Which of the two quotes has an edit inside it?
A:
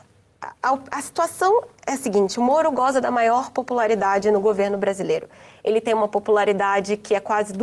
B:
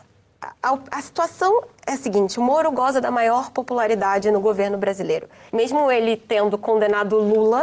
B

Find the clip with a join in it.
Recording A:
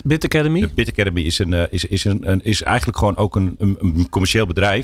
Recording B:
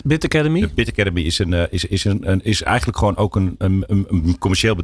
A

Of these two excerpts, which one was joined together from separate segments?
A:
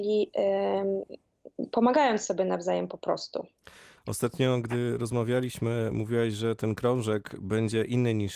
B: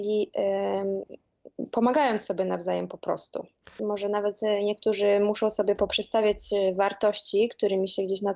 B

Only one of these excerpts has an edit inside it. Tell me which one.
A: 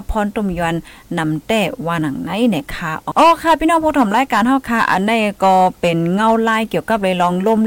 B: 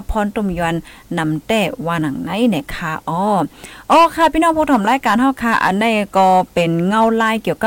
A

